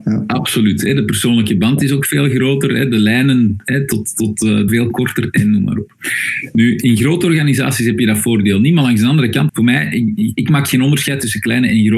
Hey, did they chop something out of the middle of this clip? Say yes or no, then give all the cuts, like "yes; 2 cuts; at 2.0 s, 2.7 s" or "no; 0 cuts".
yes; 2 cuts; at 4.7 s, 9.5 s